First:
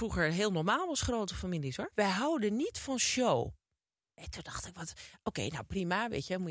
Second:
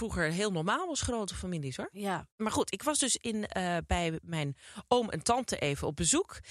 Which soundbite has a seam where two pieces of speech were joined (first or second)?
first